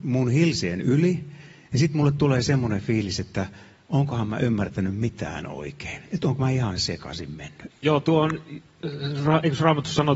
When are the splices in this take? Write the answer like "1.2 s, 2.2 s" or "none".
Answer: 7.7 s